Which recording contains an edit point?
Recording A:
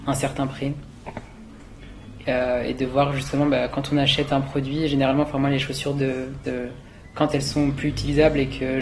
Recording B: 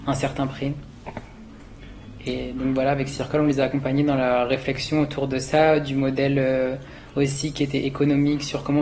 A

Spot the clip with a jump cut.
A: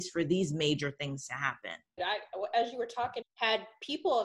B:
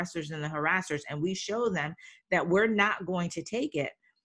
A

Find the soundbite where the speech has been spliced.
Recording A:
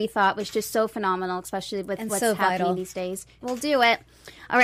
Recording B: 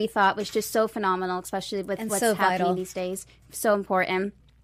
A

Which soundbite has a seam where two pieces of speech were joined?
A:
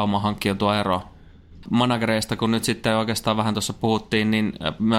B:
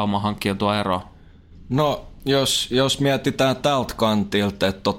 A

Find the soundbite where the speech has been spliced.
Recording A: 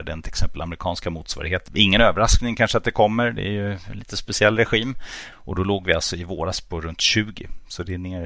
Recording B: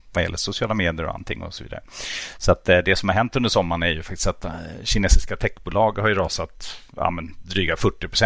A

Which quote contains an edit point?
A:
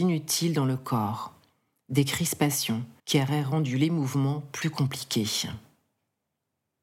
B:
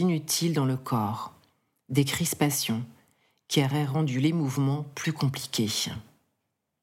A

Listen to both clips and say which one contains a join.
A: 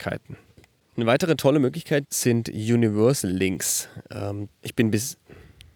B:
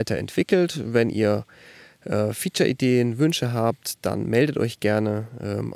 A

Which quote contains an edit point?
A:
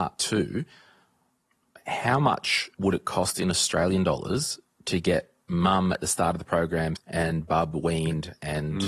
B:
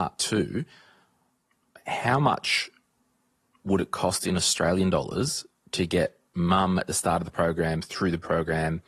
A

